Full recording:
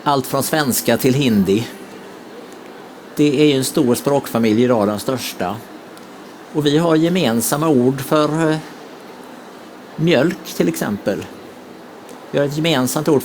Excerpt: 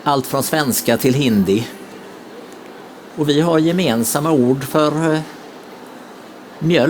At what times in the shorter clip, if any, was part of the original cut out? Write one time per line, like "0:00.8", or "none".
0:03.1

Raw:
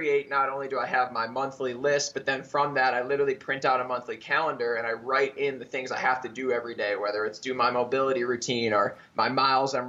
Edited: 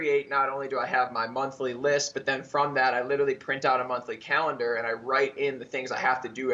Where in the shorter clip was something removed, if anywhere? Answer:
none

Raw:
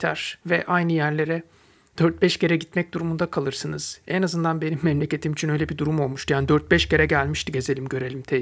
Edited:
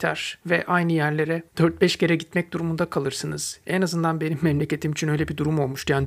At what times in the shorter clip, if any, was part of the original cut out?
0:01.5

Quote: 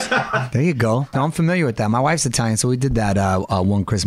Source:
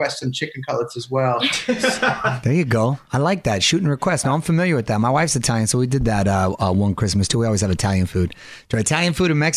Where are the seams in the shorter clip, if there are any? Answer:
0:01.1

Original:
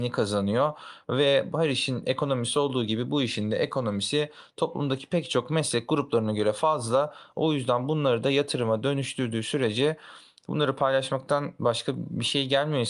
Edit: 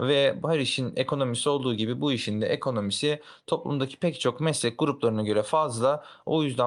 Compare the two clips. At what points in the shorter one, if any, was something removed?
none

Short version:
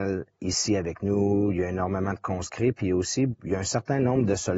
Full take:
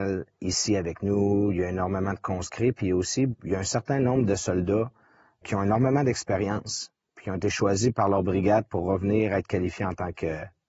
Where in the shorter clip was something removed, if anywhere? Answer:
none

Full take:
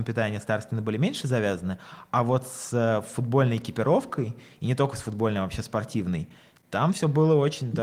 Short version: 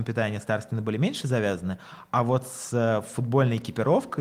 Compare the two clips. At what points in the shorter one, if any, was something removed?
none

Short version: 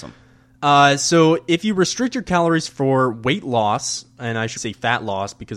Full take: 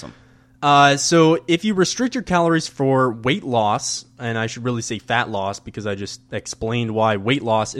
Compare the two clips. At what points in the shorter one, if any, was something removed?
0:04.6

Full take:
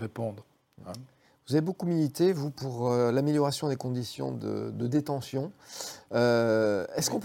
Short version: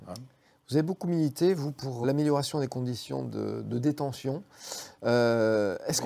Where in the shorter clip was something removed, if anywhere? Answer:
0:02.0

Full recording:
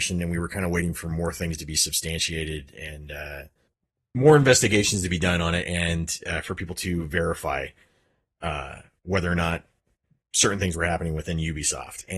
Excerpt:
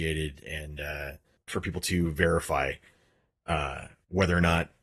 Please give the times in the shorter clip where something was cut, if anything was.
0:01.5

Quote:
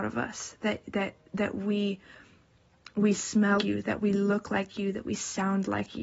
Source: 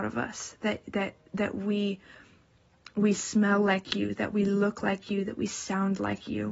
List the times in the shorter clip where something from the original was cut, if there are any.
0:03.6

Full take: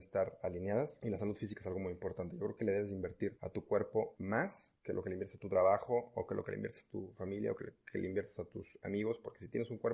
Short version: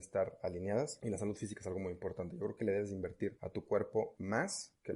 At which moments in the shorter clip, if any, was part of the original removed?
none

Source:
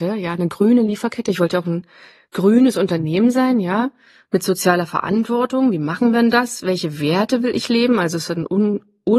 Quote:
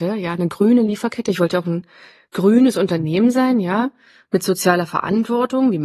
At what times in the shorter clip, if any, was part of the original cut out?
none

